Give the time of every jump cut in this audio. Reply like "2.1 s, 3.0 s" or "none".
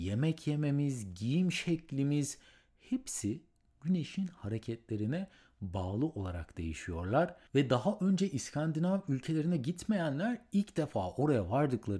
none